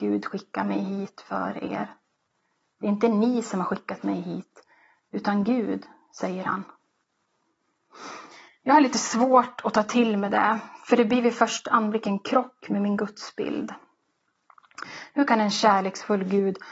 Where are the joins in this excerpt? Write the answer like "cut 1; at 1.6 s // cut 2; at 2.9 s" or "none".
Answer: none